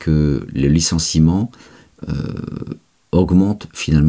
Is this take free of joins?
yes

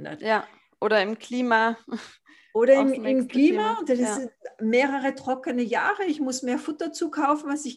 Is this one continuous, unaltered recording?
yes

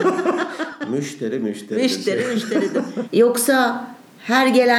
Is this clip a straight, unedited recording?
no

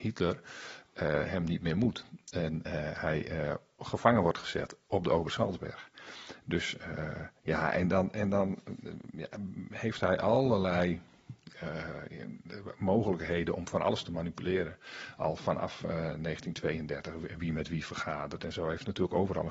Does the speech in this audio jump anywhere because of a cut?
no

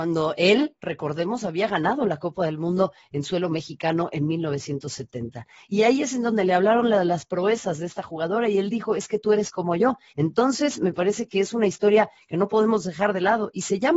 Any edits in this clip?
yes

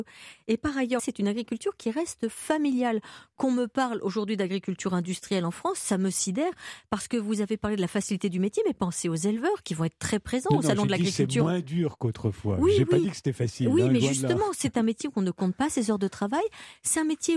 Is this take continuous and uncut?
no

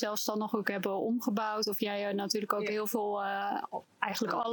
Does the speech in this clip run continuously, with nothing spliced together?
yes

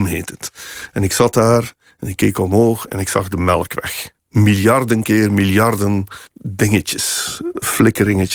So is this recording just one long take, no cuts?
no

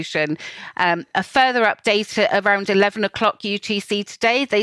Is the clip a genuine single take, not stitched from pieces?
yes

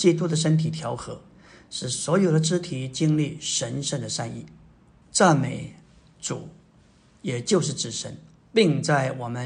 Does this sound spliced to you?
yes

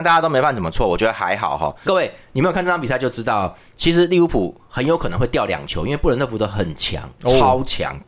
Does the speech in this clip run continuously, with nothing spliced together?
no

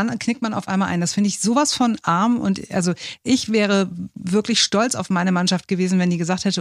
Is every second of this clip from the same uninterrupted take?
yes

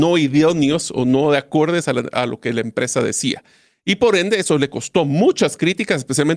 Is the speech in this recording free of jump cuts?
yes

